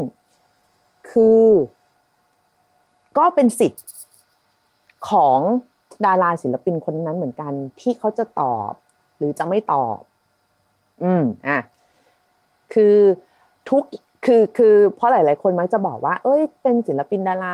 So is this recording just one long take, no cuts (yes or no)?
no